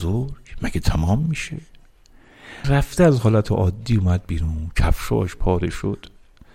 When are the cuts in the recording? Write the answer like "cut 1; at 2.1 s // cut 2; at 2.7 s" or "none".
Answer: cut 1; at 2.6 s